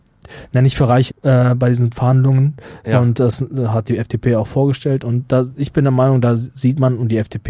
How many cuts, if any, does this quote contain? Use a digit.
1